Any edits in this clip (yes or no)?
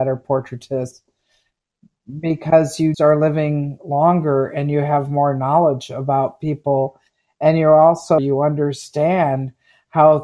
yes